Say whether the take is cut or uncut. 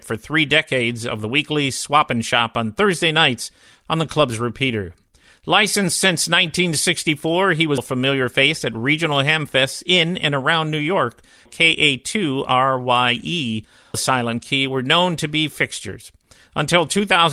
cut